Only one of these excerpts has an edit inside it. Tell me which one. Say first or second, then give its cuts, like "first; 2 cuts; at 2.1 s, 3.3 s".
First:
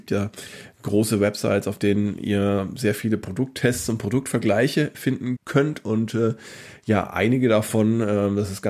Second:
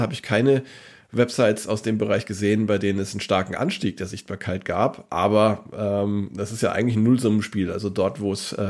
first; 1 cut; at 5.4 s